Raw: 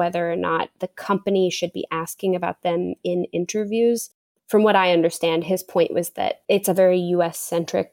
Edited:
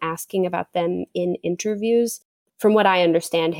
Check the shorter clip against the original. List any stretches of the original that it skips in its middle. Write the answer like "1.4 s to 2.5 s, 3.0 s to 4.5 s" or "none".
none